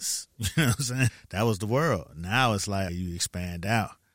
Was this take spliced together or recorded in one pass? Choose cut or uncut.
cut